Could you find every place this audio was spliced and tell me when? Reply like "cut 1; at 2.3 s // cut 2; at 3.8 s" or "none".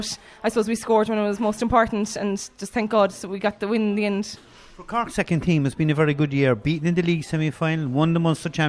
none